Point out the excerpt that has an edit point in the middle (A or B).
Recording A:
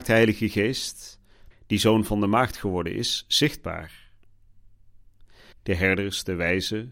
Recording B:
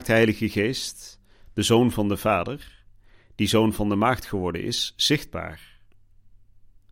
A